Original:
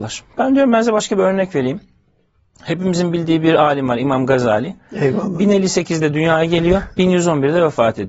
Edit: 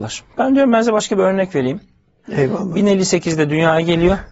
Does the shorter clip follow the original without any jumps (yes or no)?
no